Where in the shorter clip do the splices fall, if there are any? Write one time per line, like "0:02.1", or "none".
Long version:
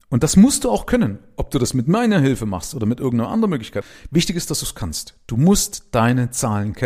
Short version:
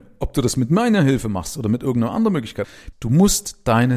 0:02.9